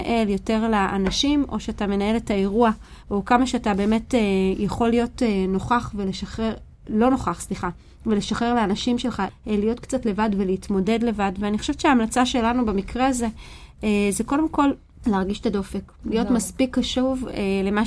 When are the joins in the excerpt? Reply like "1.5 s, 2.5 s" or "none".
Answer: none